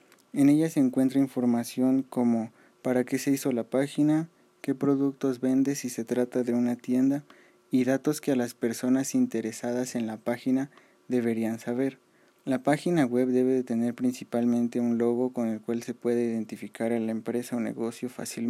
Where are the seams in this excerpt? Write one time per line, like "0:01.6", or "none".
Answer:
0:12.3